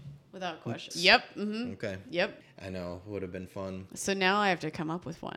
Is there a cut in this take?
yes; 2 cuts; at 0.9 s, 2.4 s

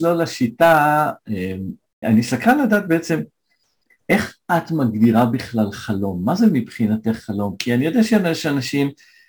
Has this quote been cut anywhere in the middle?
yes; 1 cut; at 2.0 s

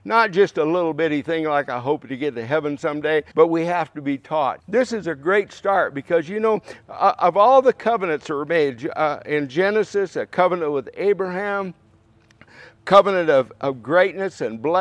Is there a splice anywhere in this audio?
yes; 2 cuts; at 3.3 s, 4.6 s

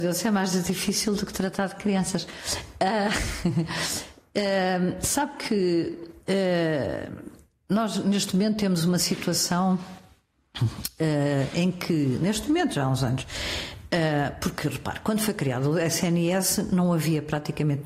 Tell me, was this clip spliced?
no; 0 cuts

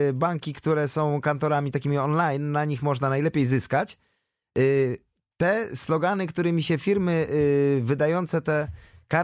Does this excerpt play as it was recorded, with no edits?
yes; 0 cuts

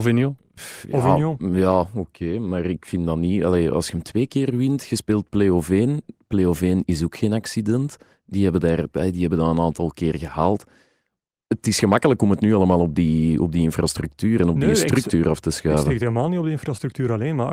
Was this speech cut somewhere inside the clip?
no; 0 cuts

